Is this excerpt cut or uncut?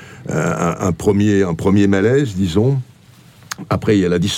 uncut